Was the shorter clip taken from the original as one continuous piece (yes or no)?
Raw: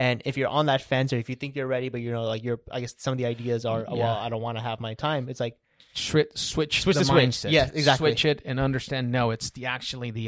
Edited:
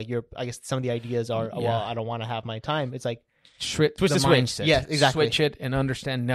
no